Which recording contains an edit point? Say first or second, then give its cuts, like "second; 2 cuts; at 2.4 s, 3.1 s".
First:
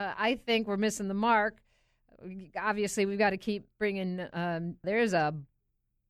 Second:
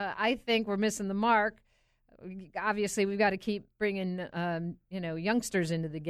first; 1 cut; at 4.8 s